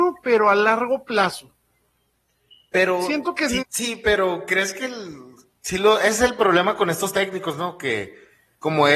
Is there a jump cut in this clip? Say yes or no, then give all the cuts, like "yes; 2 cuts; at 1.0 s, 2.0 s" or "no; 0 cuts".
yes; 1 cut; at 3.6 s